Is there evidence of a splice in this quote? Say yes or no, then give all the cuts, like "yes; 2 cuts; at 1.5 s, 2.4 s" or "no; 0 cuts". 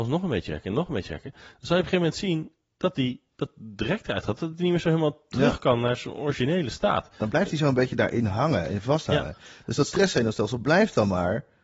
no; 0 cuts